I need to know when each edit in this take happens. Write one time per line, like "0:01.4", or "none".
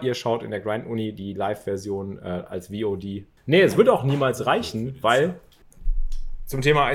0:03.4